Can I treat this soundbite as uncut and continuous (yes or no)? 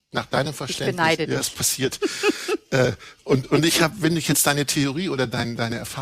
yes